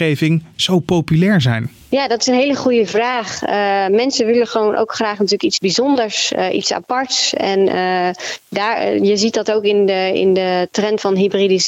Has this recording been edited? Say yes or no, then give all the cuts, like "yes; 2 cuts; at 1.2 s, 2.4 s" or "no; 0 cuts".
no; 0 cuts